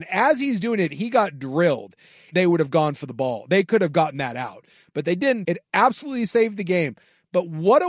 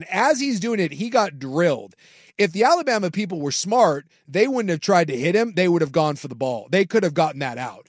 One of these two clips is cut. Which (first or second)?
first